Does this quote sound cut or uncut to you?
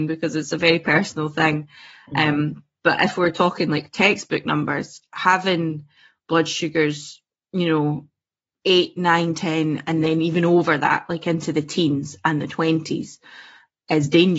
uncut